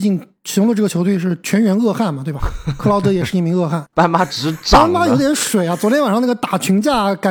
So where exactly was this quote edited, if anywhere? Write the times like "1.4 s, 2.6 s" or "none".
3.9 s